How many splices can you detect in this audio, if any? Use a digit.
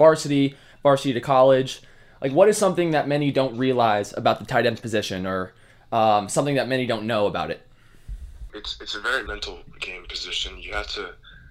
1